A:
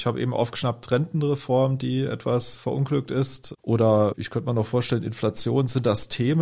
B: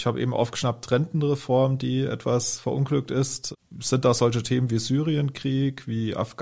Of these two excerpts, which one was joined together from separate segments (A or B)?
A